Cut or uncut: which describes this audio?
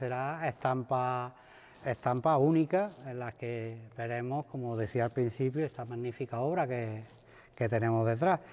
uncut